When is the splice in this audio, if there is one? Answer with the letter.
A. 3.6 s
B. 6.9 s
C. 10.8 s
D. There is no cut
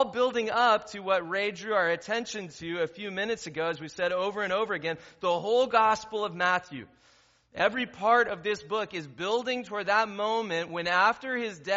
D